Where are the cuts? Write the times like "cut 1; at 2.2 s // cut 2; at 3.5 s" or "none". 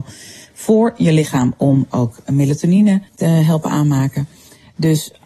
cut 1; at 3.1 s